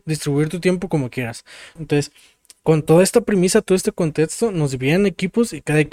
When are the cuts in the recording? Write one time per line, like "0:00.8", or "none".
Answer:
0:01.8